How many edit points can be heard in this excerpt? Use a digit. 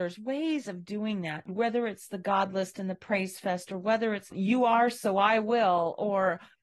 1